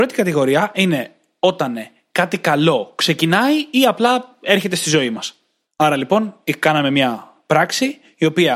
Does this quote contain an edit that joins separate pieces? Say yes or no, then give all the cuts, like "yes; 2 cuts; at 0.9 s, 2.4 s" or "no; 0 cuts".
no; 0 cuts